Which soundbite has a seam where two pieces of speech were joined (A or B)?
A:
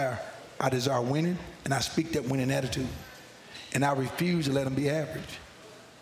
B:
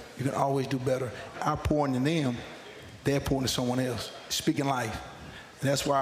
B